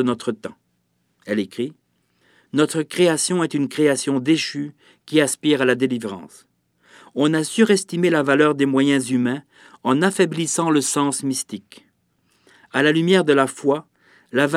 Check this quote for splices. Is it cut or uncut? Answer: uncut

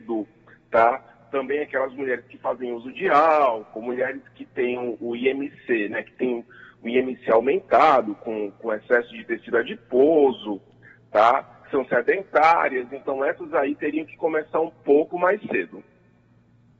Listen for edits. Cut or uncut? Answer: uncut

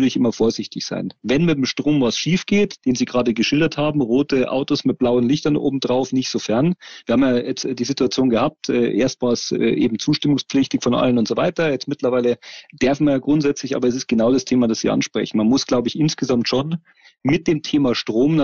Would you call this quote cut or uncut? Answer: cut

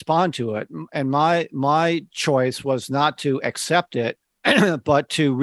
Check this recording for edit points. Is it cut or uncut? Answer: cut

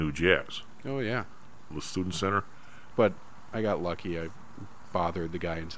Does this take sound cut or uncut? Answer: cut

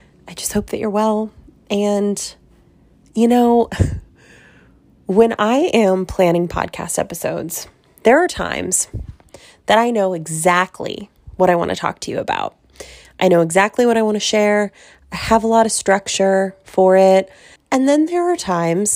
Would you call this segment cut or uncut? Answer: cut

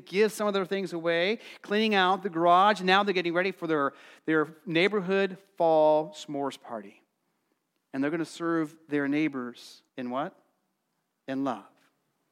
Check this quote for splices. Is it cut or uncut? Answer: cut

